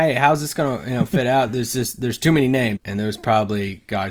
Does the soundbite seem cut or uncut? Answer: cut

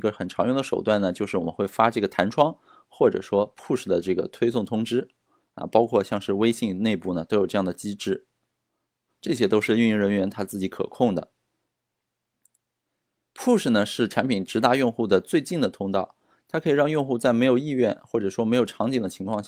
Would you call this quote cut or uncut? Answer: cut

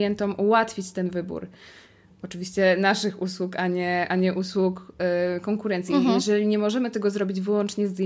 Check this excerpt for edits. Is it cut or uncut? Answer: uncut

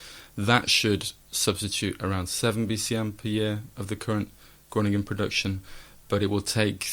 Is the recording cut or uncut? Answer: uncut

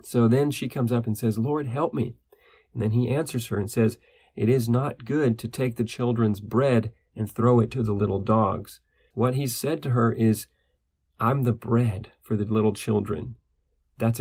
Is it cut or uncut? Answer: cut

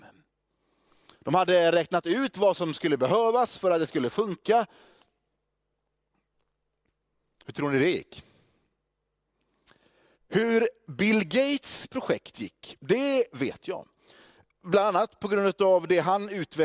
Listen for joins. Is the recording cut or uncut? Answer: cut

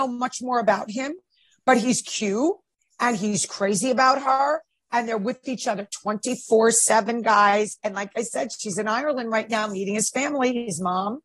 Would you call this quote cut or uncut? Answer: uncut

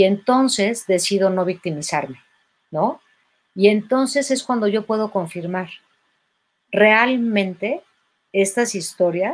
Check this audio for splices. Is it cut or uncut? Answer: uncut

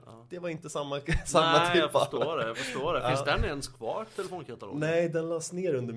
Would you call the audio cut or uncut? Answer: uncut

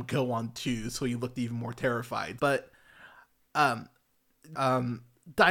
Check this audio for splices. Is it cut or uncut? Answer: cut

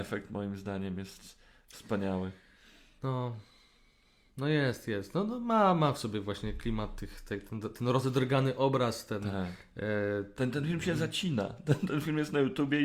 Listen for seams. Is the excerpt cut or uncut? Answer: uncut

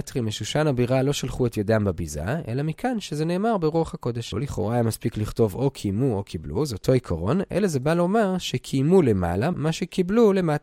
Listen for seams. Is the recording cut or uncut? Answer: cut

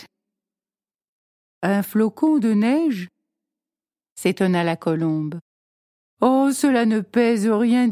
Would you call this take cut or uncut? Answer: uncut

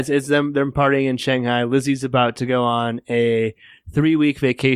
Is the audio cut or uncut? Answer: uncut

